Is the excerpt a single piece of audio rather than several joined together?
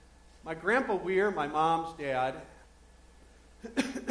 no; 1 cut; at 2.6 s

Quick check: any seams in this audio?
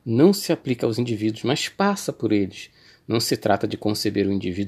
no; 0 cuts

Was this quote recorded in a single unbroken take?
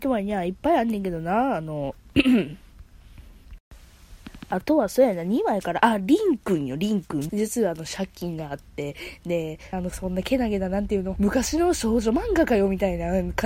no; 3 cuts; at 7.3 s, 9.7 s, 11.2 s

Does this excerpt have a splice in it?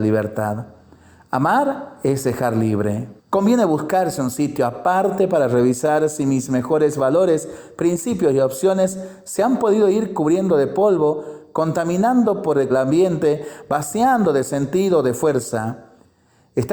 yes; 2 cuts; at 3.2 s, 12.7 s

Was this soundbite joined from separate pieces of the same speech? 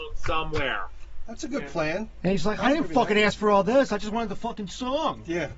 no; 0 cuts

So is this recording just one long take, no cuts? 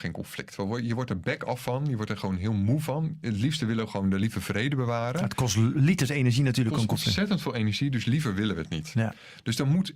yes; 0 cuts

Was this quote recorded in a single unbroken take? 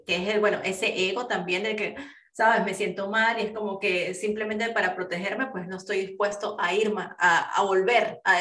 yes; 0 cuts

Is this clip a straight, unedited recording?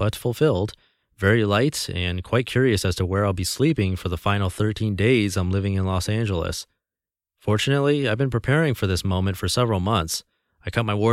yes; 0 cuts

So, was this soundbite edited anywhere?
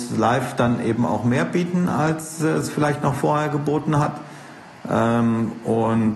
no; 0 cuts

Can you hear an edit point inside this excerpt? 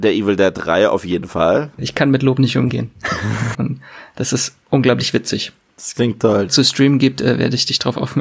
yes; 3 cuts; at 1.8 s, 3.5 s, 6.5 s

